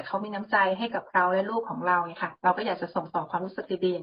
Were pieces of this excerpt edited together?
no; 0 cuts

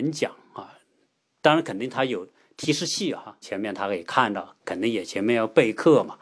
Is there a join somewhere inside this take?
yes; 2 cuts; at 3.4 s, 4.6 s

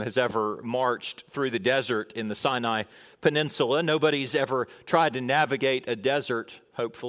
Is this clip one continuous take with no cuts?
yes; 0 cuts

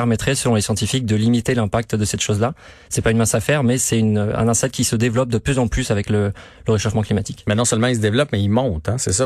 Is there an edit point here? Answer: yes; 1 cut; at 2.8 s

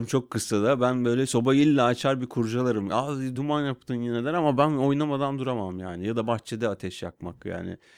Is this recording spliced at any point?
yes; 1 cut; at 3.3 s

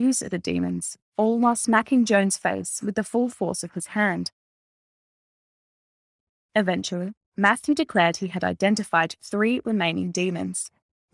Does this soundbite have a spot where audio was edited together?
yes; 1 cut; at 1.0 s

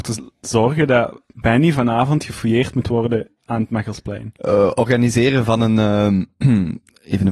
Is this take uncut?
no; 1 cut; at 4.4 s

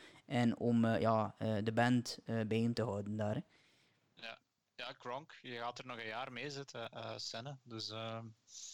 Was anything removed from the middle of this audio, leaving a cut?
no; 0 cuts

